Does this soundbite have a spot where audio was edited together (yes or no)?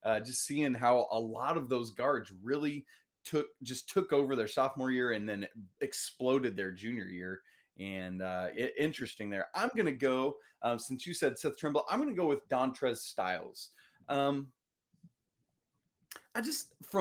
yes